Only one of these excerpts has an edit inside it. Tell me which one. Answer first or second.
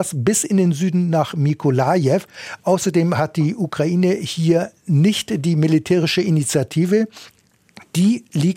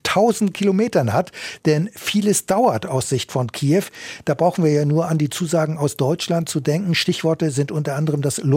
second